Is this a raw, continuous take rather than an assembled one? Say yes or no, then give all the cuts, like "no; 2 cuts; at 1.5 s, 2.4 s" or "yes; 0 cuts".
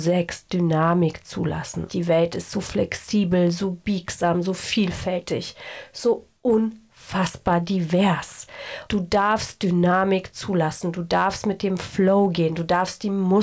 no; 2 cuts; at 1.9 s, 8.9 s